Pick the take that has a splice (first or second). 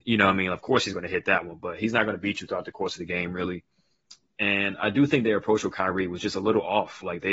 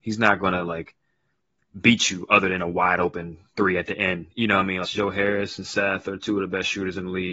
second